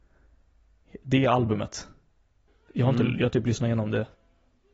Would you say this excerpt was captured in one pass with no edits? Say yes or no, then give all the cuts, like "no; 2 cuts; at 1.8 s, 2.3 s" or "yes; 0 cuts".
yes; 0 cuts